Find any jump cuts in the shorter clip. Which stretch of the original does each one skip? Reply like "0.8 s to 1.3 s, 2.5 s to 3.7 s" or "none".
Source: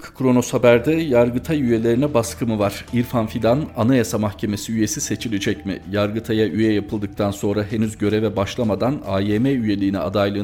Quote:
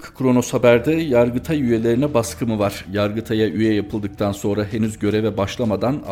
2.9 s to 5.8 s

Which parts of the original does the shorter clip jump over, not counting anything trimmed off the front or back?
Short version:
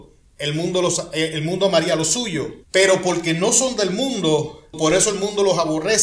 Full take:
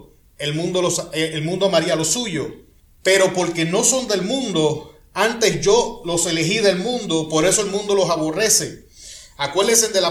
2.6 s to 2.9 s, 5.0 s to 7.3 s

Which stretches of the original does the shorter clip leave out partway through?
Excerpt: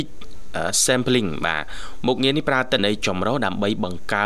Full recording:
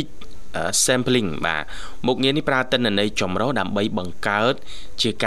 2.8 s to 2.9 s

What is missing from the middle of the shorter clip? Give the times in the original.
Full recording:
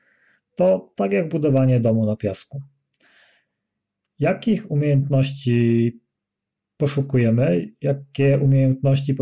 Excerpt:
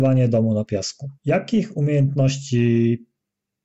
2.7 s to 4.1 s

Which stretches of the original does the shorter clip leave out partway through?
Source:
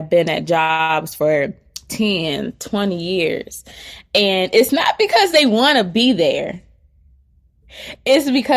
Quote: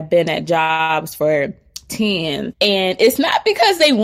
2.5 s to 4.1 s

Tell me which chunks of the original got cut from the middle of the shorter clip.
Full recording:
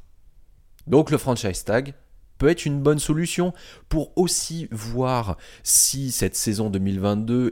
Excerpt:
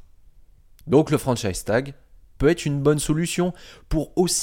none

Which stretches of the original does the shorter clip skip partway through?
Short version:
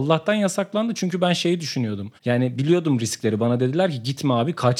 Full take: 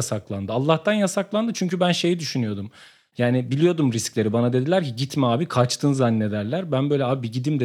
2.7 s to 3.1 s

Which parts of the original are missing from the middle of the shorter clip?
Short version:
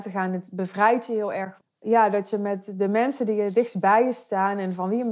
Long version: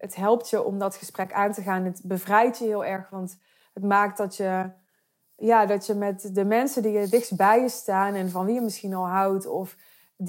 3.1 s to 5.1 s

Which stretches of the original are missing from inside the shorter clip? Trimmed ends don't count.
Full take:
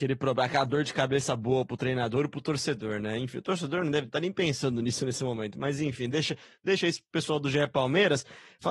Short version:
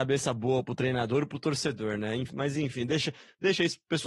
3.3 s to 5.5 s

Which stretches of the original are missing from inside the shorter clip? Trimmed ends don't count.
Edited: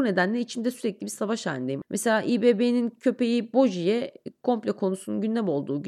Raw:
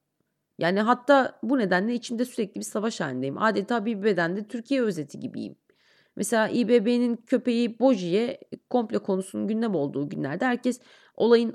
3.4 s to 6.1 s

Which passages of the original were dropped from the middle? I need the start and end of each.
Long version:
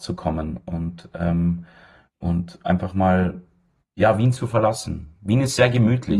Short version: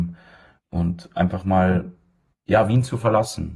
none

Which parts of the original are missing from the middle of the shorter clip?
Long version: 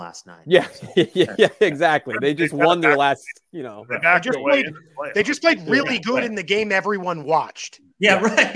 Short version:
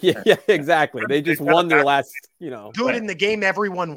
3.9 s to 6.0 s

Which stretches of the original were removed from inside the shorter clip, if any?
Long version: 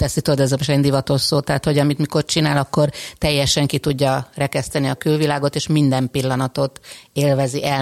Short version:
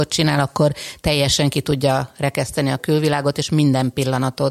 none

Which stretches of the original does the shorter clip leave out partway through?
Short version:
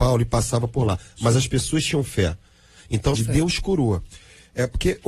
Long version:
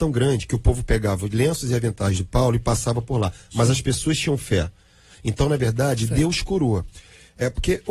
5.5 s to 6.0 s

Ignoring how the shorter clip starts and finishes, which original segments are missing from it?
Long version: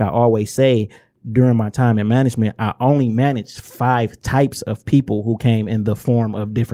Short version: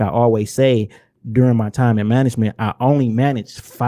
none

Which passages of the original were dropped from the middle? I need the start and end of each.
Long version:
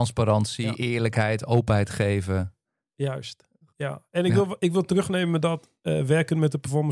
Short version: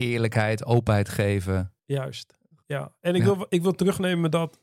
2.6 s to 2.9 s

